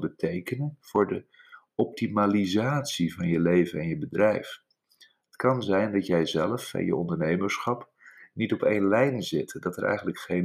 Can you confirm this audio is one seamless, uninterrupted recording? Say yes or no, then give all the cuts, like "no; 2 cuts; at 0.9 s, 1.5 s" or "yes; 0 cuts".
yes; 0 cuts